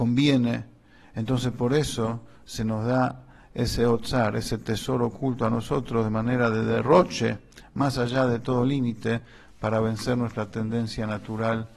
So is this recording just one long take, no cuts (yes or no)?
yes